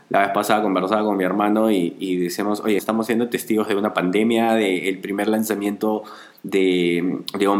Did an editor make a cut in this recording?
yes; 1 cut; at 2.8 s

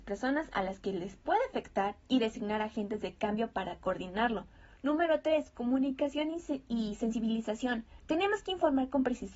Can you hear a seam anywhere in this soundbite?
yes; 1 cut; at 8.0 s

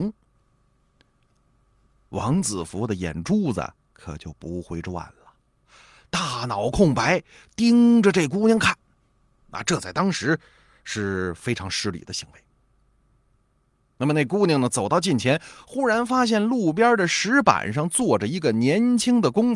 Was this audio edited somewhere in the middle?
no; 0 cuts

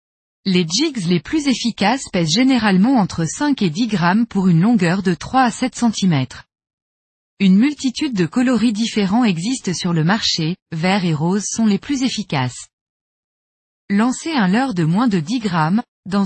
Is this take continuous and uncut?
no; 1 cut; at 10.7 s

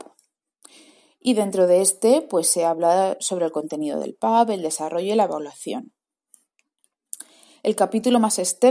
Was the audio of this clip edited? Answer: no; 0 cuts

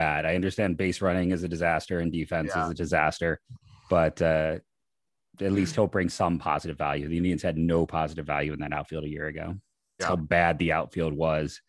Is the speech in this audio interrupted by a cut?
yes; 1 cut; at 10.0 s

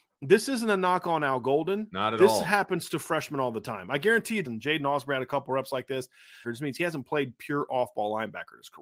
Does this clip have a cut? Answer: yes; 2 cuts; at 4.4 s, 6.4 s

